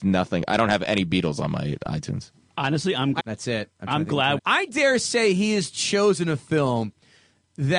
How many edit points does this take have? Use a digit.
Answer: 2